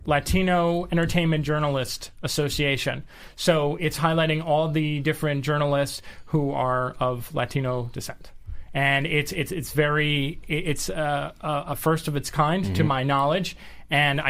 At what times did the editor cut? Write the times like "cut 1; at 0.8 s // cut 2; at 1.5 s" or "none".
none